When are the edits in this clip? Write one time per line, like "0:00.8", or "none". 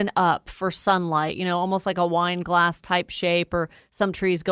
none

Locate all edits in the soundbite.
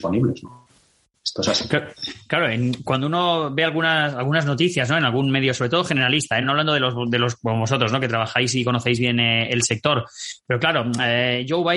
none

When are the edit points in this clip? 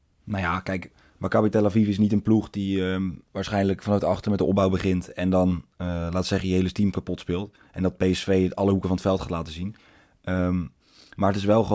none

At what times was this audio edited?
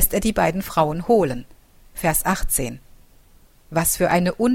0:01.9

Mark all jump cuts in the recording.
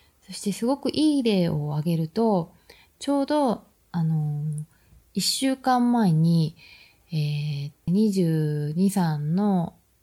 0:07.9

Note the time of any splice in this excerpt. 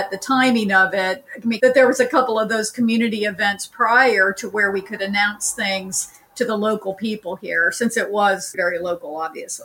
0:01.6
0:08.5

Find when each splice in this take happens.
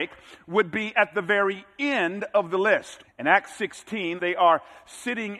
0:03.0
0:04.2

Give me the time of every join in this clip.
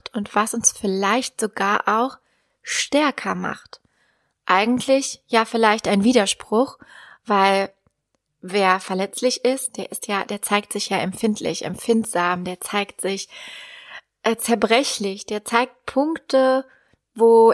none

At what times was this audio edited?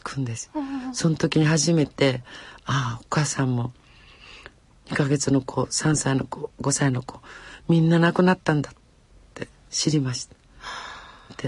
none

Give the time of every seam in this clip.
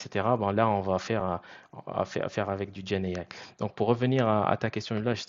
none

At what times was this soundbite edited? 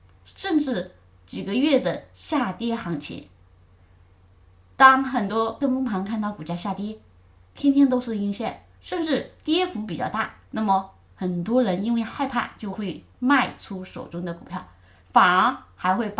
0:08.8
0:10.4
0:15.0

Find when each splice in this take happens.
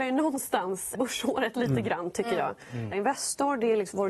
0:00.9
0:02.9

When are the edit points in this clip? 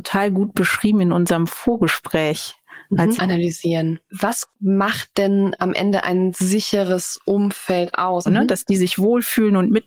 0:03.2
0:08.3

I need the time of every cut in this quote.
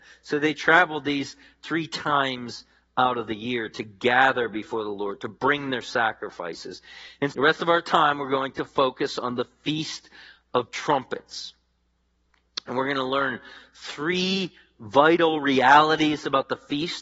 0:07.3

